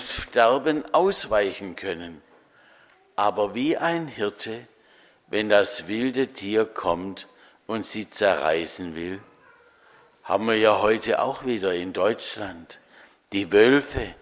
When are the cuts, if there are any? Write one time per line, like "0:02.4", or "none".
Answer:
0:05.1